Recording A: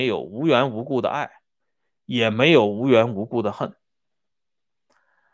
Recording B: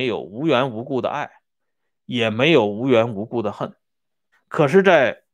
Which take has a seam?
B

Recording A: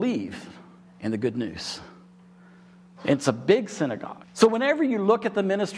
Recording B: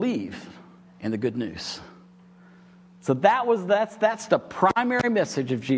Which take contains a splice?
A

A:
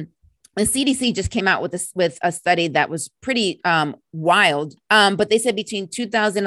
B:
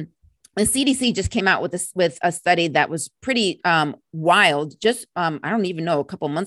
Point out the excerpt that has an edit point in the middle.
A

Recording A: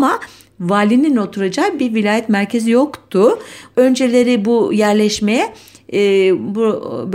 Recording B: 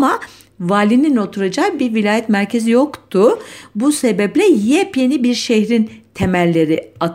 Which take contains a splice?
A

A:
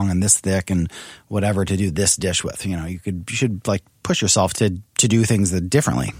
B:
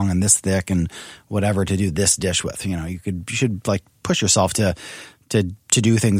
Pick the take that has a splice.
A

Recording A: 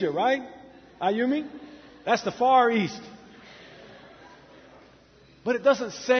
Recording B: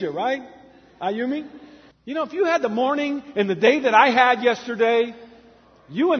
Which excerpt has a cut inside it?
B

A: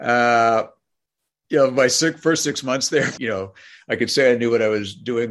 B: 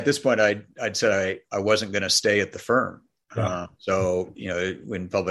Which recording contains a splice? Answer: A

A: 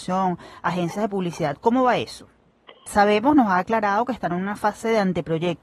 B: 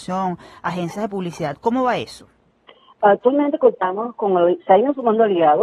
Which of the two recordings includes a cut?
A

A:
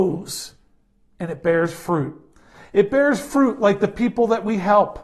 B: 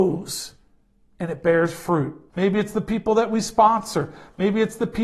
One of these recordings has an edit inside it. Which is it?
B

